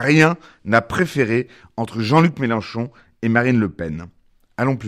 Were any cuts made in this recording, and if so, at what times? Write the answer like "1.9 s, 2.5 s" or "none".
none